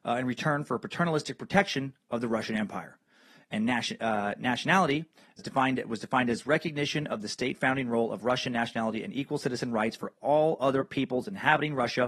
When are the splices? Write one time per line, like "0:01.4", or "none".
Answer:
0:05.4